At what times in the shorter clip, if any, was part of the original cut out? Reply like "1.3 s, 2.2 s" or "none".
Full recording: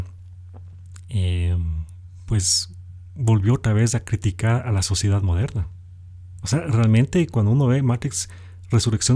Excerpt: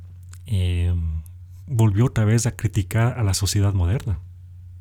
1.6 s